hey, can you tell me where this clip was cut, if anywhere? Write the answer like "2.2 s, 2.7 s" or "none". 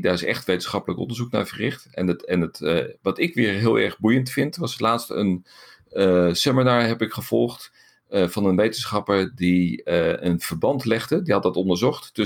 none